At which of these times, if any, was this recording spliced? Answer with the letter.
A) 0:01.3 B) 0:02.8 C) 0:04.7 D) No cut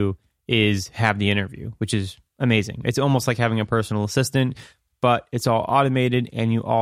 B